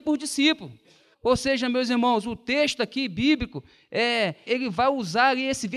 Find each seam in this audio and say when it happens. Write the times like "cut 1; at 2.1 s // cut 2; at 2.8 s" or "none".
cut 1; at 1.1 s // cut 2; at 4.5 s